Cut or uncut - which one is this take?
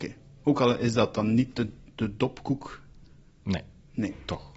uncut